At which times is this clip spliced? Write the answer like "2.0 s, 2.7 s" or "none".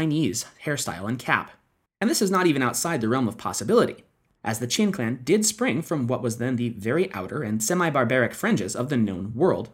1.9 s